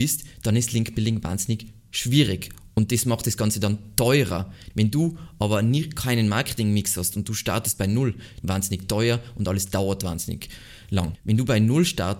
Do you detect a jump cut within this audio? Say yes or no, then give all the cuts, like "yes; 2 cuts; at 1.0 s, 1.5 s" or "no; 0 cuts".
yes; 3 cuts; at 4.7 s, 8.4 s, 11.1 s